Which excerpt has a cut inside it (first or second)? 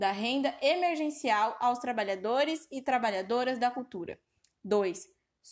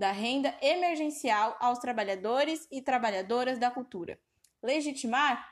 second